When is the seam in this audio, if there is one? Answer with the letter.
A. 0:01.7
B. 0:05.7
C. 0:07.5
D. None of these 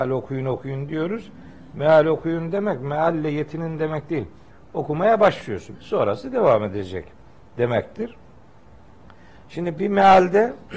B